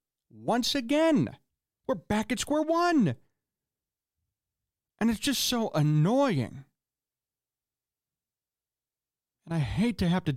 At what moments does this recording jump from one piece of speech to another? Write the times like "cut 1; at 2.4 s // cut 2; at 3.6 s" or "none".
cut 1; at 4.8 s

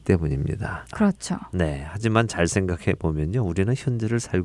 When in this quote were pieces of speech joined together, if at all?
cut 1; at 0.9 s

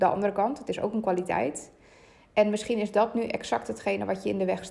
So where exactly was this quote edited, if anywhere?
none

